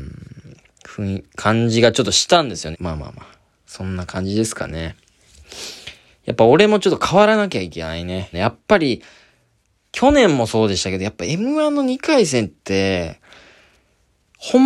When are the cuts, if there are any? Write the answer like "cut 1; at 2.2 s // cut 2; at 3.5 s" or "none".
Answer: cut 1; at 2.7 s // cut 2; at 8.3 s